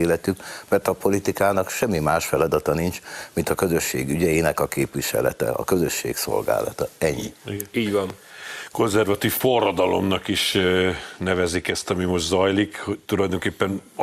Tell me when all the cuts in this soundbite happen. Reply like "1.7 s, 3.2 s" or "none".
none